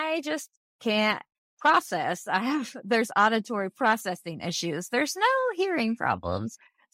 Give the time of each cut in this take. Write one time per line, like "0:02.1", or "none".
none